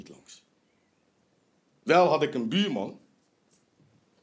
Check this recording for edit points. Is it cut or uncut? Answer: uncut